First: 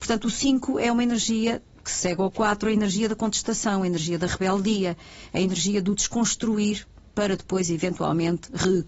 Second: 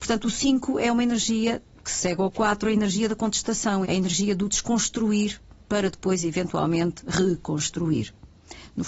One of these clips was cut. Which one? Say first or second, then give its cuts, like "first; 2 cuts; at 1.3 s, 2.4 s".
second; 1 cut; at 3.8 s